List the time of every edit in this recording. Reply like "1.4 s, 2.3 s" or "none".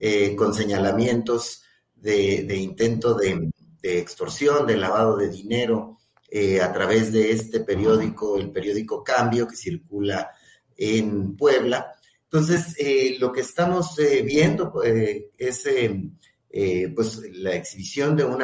none